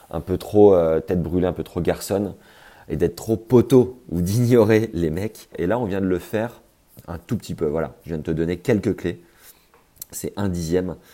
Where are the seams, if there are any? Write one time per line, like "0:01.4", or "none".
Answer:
0:05.5

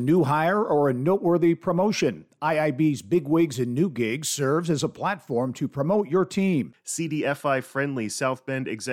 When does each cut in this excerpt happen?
0:06.7

